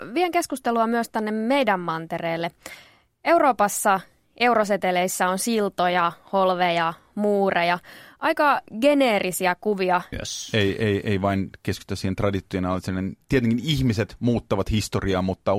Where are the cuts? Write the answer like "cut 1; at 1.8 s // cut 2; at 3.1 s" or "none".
cut 1; at 10.1 s

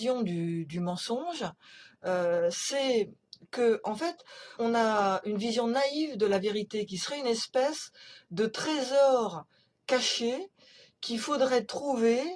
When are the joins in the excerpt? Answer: cut 1; at 4.6 s

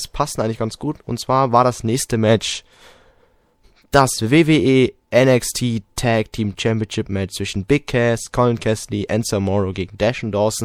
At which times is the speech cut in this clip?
none

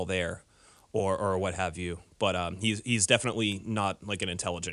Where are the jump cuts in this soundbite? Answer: none

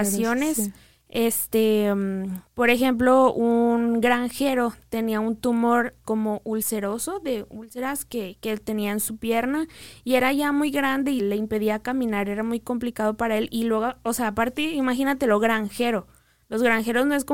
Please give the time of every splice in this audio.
cut 1; at 6.0 s // cut 2; at 11.2 s

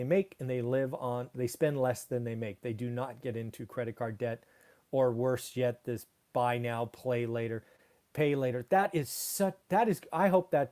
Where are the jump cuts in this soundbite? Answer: none

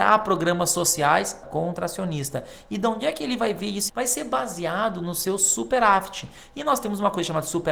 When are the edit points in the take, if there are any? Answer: cut 1; at 1.4 s // cut 2; at 3.9 s

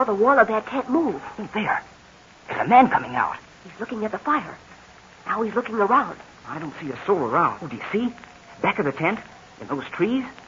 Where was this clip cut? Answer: cut 1; at 6.4 s // cut 2; at 7.6 s

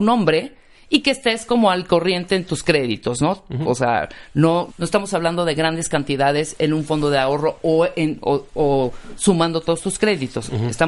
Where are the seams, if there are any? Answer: cut 1; at 4.7 s

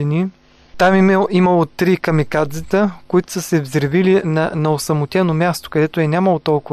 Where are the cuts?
none

